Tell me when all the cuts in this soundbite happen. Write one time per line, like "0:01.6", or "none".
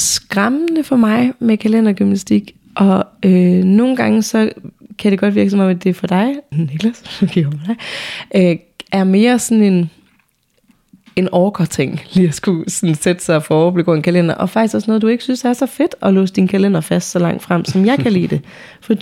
0:06.5